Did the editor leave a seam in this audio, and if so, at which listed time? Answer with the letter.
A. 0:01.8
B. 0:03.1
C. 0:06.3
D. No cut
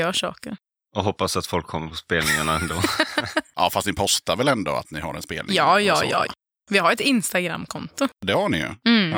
C